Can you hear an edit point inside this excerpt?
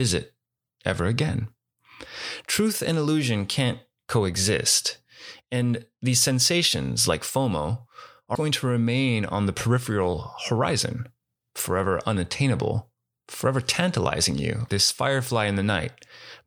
yes; 2 cuts; at 8.4 s, 14.7 s

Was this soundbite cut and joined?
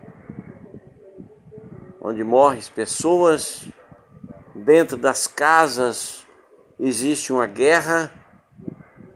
no; 0 cuts

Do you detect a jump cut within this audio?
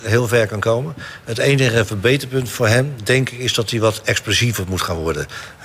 no; 0 cuts

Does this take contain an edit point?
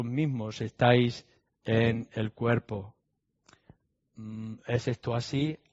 no; 0 cuts

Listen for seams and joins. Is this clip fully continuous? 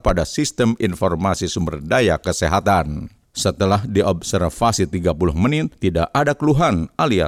no; 1 cut; at 3.2 s

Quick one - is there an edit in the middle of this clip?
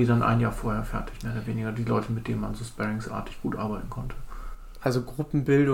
no; 0 cuts

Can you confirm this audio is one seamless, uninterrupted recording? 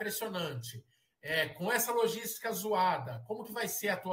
yes; 0 cuts

